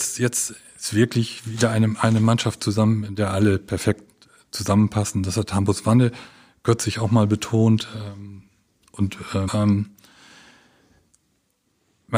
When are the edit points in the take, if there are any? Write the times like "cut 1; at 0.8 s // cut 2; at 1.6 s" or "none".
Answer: cut 1; at 9.5 s